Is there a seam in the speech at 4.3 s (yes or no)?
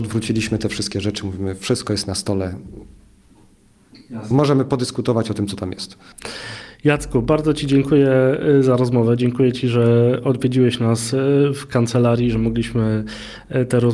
no